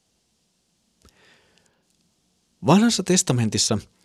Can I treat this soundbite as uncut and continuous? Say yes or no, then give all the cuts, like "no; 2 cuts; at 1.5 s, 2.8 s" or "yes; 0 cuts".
yes; 0 cuts